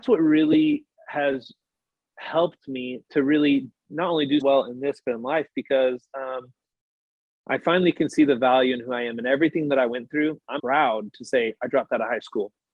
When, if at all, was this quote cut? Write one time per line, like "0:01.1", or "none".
0:04.4
0:10.6